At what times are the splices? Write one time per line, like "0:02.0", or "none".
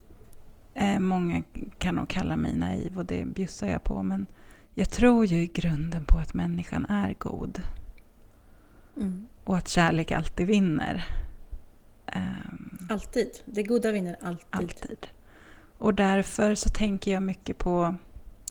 none